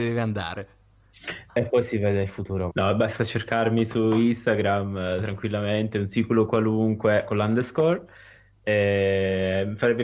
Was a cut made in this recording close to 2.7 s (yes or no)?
yes